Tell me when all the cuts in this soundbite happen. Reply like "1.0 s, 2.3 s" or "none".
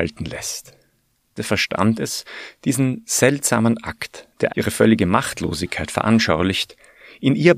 1.4 s, 4.5 s